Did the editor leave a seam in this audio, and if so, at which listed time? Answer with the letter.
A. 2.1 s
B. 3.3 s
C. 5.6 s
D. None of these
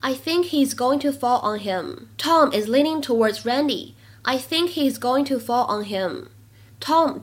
A